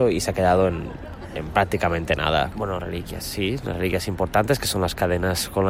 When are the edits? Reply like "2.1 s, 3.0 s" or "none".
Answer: 2.5 s